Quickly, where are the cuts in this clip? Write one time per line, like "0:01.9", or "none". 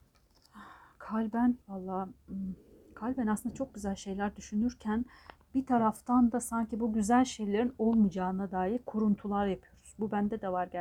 0:01.6